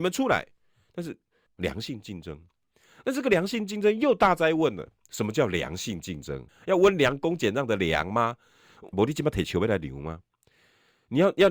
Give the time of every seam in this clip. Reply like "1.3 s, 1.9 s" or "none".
1.5 s, 6.5 s, 8.9 s